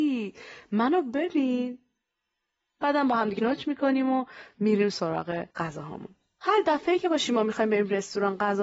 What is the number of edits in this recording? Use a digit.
2